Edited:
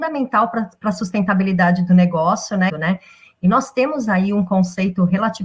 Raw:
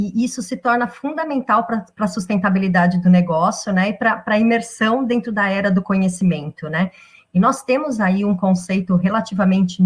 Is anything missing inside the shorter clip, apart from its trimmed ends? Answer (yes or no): yes